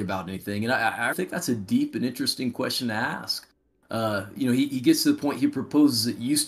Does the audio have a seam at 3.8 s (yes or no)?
no